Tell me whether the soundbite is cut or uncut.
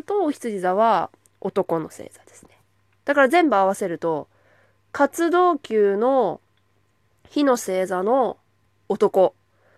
uncut